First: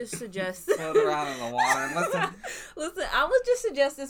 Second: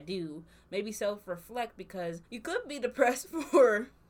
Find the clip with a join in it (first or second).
second